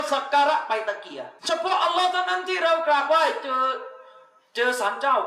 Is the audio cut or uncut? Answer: cut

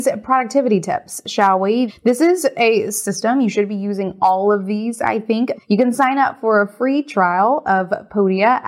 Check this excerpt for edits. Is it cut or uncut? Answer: cut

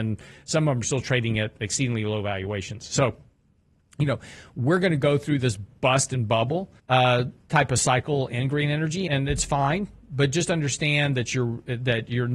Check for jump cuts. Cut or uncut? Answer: cut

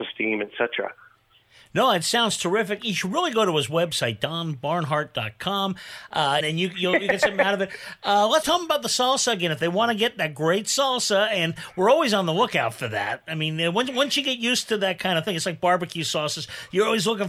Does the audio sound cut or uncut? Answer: cut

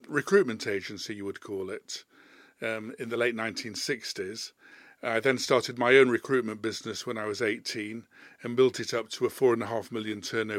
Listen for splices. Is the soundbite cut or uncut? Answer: uncut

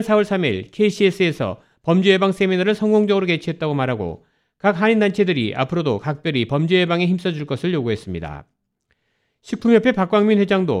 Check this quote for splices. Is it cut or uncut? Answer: uncut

